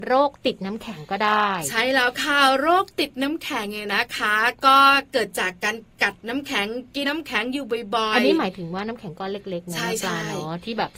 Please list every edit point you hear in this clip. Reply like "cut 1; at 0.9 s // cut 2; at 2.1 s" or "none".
cut 1; at 7.0 s